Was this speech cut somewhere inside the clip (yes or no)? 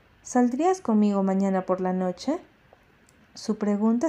no